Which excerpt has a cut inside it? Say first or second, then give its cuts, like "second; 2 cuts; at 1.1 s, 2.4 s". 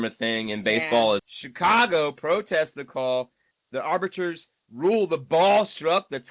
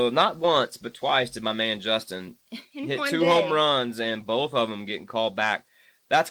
first; 1 cut; at 1.2 s